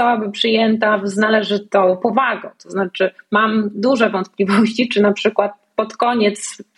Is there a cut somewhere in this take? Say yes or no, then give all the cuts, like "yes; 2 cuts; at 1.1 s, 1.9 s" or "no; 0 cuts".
no; 0 cuts